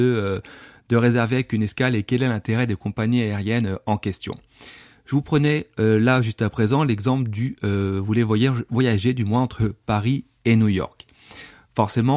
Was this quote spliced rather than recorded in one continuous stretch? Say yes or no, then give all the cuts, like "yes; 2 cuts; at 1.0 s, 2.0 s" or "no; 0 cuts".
no; 0 cuts